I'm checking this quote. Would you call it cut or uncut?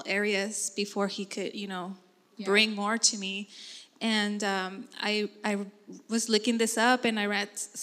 uncut